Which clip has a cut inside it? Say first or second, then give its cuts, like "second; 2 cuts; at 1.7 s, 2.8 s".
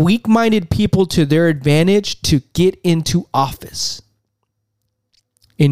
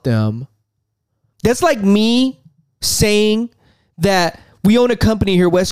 second; 1 cut; at 1.3 s